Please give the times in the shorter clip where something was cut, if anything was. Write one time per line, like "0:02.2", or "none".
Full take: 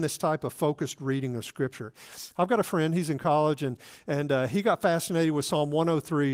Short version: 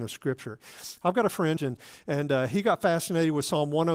0:01.6